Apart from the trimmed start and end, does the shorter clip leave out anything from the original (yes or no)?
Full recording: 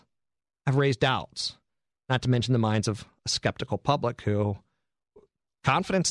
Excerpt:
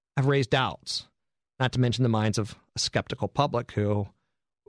no